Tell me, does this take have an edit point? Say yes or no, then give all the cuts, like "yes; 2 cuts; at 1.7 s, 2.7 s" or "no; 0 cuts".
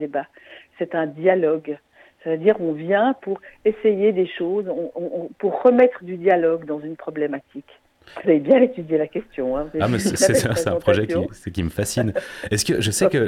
yes; 1 cut; at 8.2 s